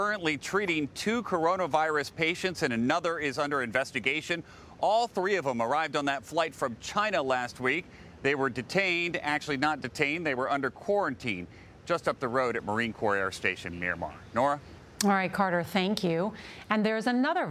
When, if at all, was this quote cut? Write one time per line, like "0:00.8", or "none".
none